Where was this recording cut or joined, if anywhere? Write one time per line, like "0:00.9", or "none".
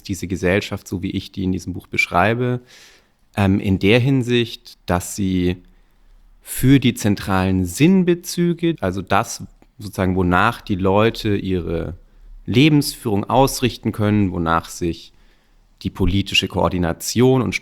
0:08.8